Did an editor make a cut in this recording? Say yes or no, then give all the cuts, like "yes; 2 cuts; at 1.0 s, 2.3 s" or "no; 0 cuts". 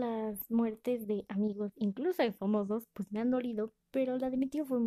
yes; 1 cut; at 1.7 s